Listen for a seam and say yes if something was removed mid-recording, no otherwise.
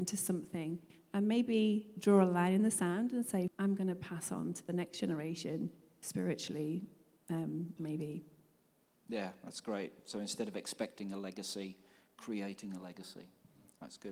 yes